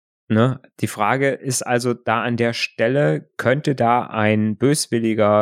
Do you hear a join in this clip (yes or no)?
no